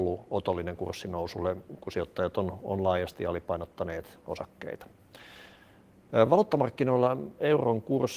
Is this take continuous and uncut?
yes; 0 cuts

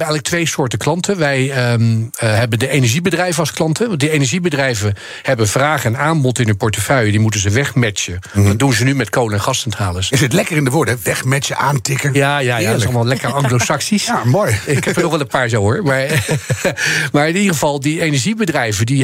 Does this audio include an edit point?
no; 0 cuts

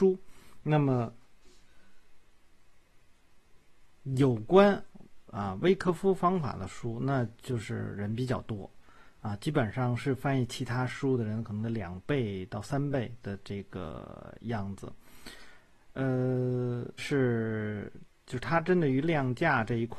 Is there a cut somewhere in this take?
yes; 1 cut; at 17.0 s

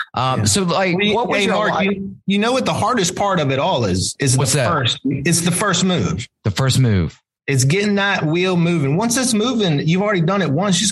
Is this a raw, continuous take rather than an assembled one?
yes; 0 cuts

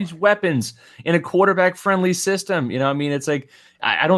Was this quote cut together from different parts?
no; 0 cuts

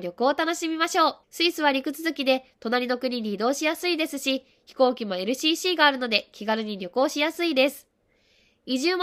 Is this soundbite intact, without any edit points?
no; 1 cut; at 1.2 s

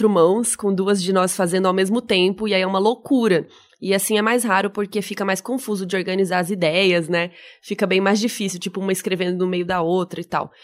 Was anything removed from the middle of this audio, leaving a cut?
no; 0 cuts

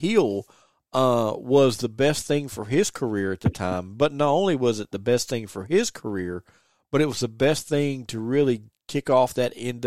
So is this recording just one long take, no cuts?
yes; 0 cuts

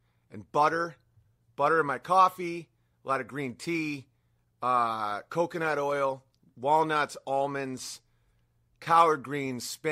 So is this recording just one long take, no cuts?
yes; 0 cuts

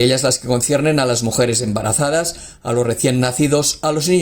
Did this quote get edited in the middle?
no; 0 cuts

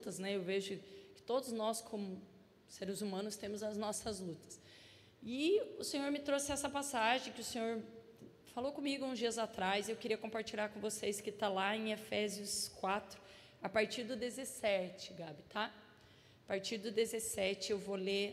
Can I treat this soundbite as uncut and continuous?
yes; 0 cuts

